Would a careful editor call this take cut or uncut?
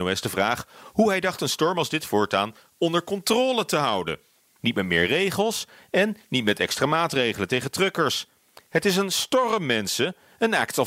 cut